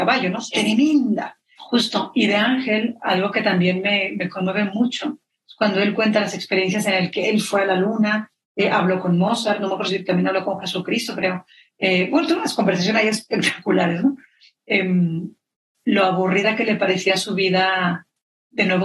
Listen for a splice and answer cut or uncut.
cut